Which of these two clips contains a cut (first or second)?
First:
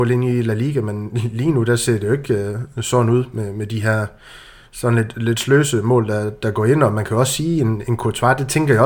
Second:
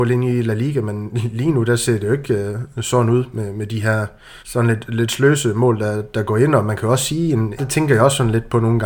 second